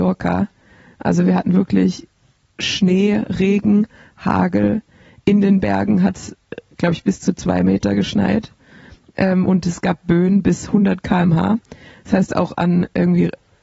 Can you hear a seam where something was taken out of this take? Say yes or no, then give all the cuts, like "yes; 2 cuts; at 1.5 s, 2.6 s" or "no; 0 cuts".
no; 0 cuts